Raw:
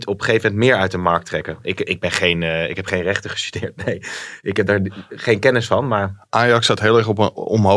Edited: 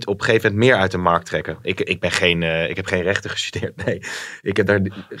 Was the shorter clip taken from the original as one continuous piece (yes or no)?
yes